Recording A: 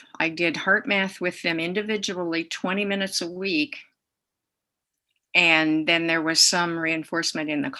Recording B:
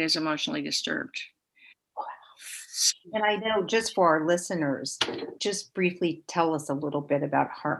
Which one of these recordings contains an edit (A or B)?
B